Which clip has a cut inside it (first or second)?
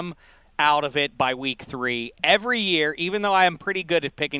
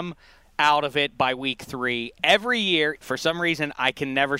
second